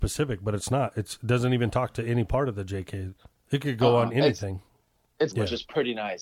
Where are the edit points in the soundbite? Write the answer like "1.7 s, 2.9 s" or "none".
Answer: 5.3 s